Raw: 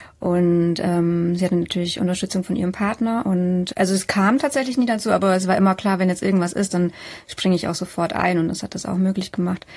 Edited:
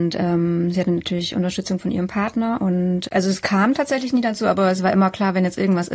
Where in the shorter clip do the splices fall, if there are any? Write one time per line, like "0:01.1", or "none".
none